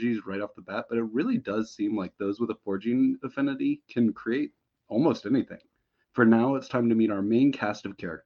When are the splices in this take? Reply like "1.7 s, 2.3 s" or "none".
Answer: 6.0 s

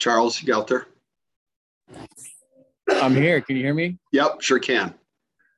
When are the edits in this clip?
4.1 s

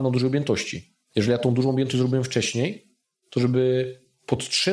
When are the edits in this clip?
none

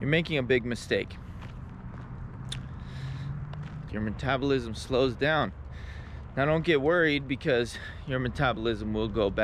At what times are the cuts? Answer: 3.9 s

